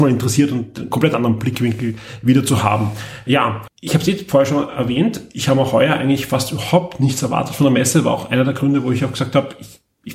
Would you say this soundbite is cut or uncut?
cut